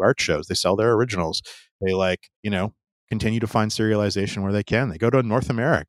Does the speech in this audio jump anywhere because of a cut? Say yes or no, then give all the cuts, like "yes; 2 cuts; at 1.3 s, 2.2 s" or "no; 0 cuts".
yes; 1 cut; at 2.3 s